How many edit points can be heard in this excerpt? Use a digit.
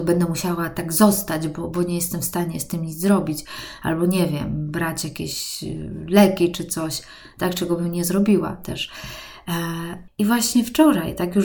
1